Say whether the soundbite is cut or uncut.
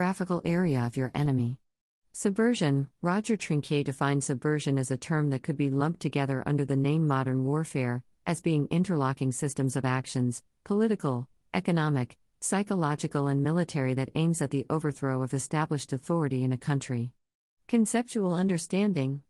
uncut